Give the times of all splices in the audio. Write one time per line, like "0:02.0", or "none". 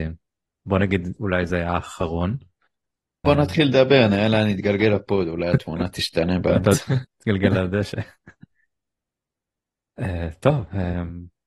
0:01.2
0:03.2
0:07.0